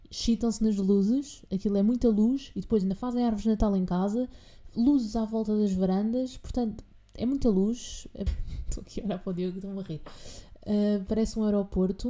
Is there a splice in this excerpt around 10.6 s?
no; 1 cut; at 8.3 s

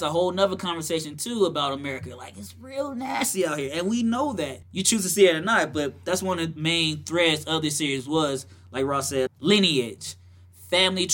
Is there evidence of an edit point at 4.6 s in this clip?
yes; 2 cuts; at 4.6 s, 9.3 s

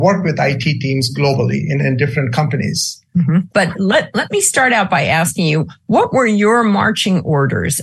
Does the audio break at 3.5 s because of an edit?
yes; 2 cuts; at 1.8 s, 3.5 s

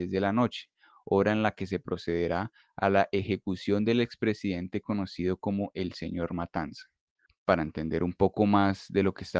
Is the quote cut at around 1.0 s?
no; 1 cut; at 7.3 s

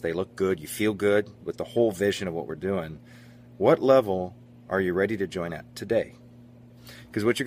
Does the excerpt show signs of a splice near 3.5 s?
no; 1 cut; at 1.4 s

